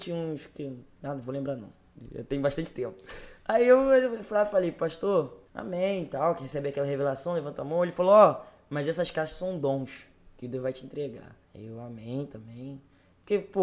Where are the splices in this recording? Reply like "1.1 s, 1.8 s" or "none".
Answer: 5.5 s, 11.4 s